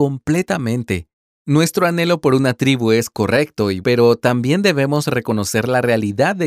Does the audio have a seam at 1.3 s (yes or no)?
yes